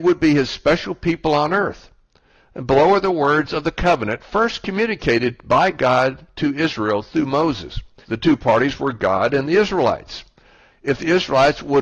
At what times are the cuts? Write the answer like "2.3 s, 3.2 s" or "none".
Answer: 8.0 s, 10.7 s